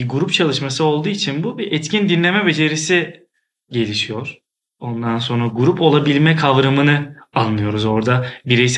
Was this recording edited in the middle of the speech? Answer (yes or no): no